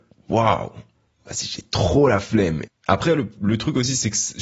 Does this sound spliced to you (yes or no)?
yes